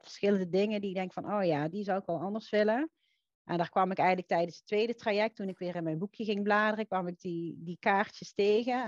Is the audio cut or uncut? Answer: uncut